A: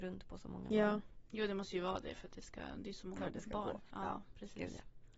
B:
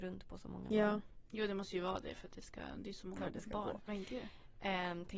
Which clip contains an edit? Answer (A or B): B